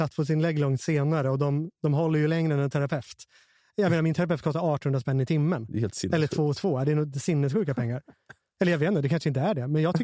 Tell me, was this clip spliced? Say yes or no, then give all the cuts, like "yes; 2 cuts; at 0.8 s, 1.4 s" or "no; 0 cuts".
no; 0 cuts